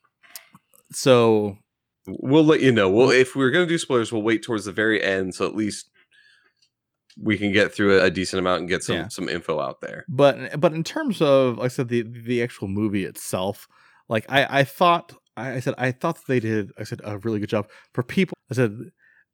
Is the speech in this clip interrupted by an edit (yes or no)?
yes